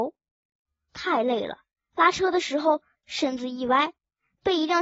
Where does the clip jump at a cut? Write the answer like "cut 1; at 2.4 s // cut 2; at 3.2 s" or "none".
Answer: cut 1; at 1.8 s // cut 2; at 2.9 s